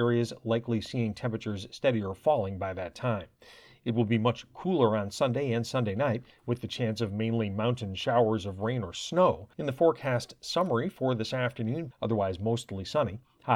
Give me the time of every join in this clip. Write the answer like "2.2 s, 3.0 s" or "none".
9.5 s, 11.9 s